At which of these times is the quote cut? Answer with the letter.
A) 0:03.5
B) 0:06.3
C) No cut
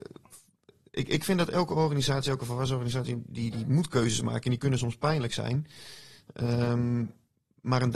A